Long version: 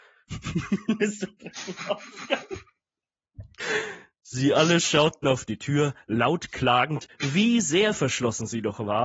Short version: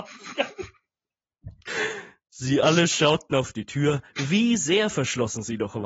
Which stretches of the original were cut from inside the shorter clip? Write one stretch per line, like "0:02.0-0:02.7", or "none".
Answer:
0:06.0-0:07.1